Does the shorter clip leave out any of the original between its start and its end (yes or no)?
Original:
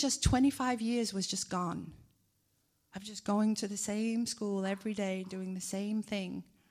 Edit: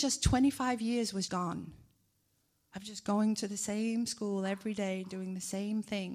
yes